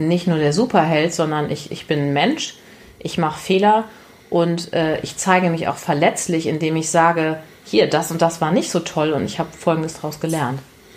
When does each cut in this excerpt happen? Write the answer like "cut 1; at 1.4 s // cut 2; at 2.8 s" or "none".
none